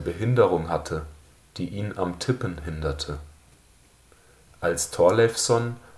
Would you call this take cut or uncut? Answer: cut